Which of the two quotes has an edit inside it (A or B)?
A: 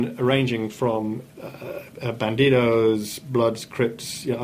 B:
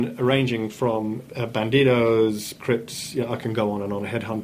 B